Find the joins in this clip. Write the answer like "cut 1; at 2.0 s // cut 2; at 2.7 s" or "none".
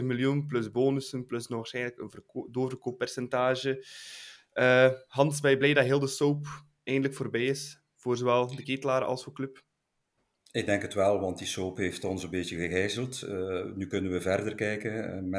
none